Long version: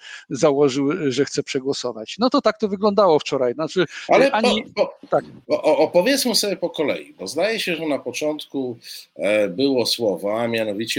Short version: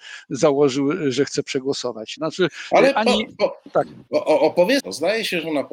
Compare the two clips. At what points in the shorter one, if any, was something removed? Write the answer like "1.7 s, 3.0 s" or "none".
2.2 s, 4.8 s